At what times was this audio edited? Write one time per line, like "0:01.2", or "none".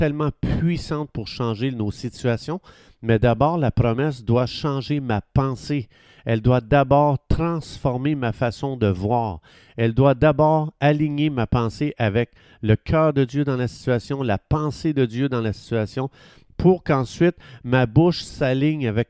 none